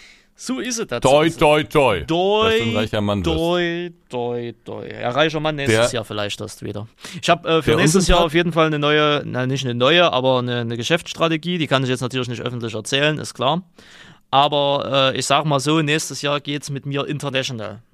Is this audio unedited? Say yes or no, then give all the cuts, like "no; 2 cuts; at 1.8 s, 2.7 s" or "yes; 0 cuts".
yes; 0 cuts